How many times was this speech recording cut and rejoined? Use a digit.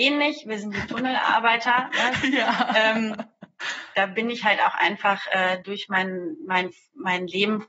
2